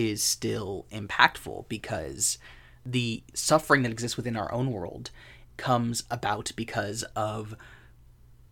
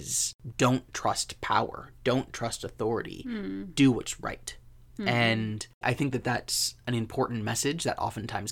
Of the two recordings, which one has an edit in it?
second; 1 cut; at 5.8 s

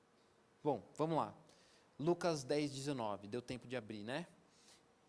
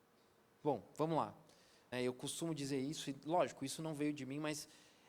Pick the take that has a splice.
second; 1 cut; at 1.9 s

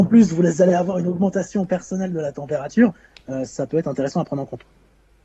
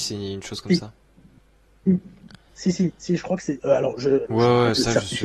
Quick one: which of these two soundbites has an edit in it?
second; 1 cut; at 4.3 s

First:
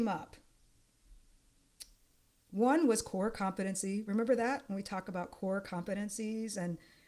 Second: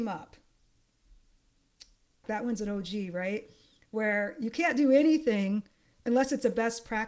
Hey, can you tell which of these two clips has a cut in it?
second; 1 cut; at 2.2 s

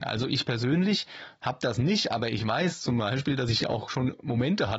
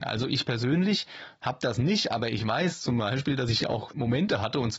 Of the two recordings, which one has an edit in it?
second; 1 cut; at 3.9 s

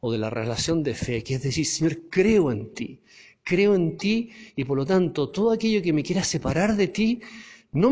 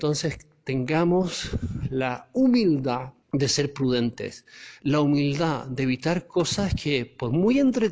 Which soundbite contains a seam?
second; 1 cut; at 3.2 s

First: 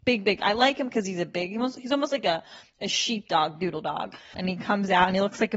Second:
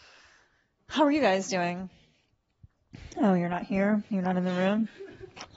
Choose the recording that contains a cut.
first; 1 cut; at 4.3 s

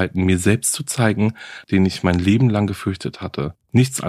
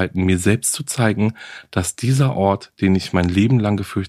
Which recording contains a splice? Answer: first; 1 cut; at 1.6 s

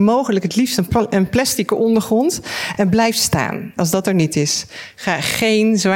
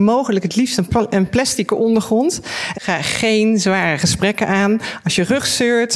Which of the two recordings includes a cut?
second; 1 cut; at 2.7 s

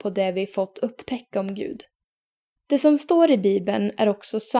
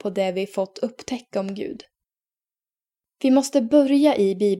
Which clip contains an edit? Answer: first; 1 cut; at 2.6 s

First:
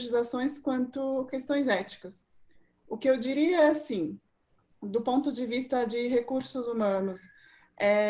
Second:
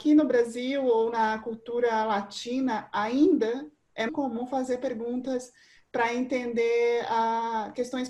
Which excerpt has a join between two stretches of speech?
second; 1 cut; at 4.1 s

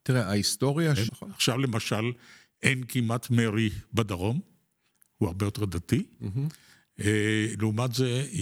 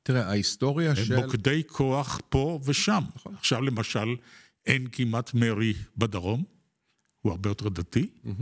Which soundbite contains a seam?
first; 1 cut; at 1.1 s

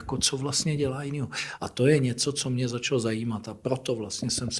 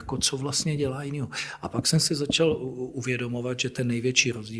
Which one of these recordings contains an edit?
first; 1 cut; at 1.6 s

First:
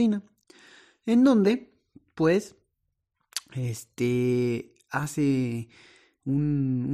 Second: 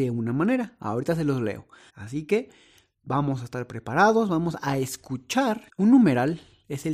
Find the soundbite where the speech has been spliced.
second; 2 cuts; at 1.9 s, 5.7 s

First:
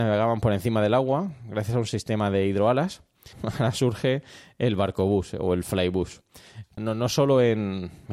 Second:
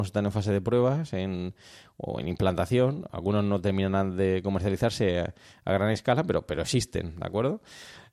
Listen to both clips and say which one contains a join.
first; 2 cuts; at 3.3 s, 6.8 s

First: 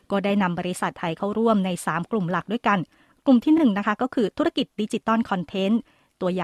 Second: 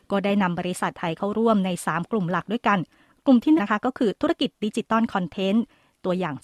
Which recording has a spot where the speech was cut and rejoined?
second; 1 cut; at 3.6 s

